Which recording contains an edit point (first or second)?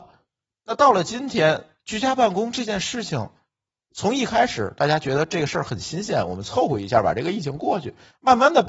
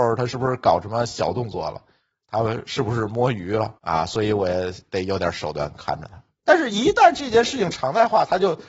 second